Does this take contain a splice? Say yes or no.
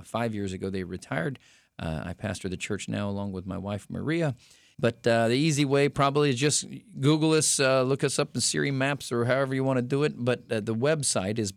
yes